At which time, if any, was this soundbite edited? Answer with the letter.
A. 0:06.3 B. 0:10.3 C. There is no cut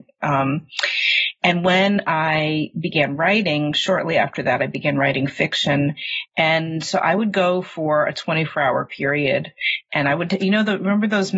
A